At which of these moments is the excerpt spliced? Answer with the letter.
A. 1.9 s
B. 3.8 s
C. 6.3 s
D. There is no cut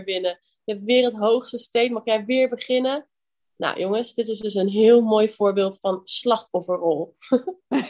D